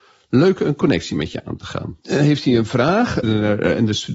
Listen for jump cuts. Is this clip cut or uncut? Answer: cut